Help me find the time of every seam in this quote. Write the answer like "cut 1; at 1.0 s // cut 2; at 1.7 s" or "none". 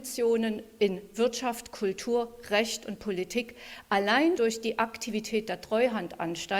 cut 1; at 4.4 s